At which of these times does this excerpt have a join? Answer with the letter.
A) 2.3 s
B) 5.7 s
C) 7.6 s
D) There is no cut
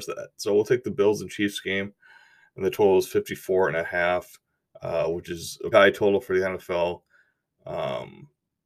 B